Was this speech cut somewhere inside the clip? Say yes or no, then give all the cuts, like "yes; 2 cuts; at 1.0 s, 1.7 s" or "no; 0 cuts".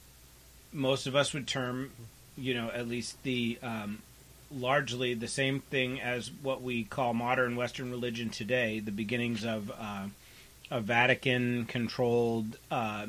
no; 0 cuts